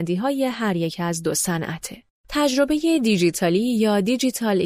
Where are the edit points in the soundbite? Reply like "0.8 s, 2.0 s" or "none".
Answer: 2.2 s